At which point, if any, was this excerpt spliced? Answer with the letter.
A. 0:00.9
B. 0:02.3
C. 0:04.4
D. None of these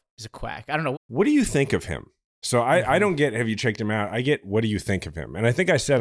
A